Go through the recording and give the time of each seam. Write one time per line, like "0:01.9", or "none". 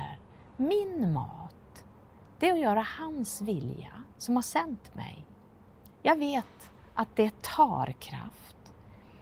0:04.1
0:05.9